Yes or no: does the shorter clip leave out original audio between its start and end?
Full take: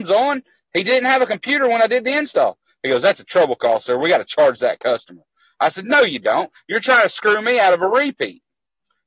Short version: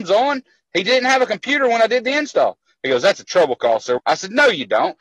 yes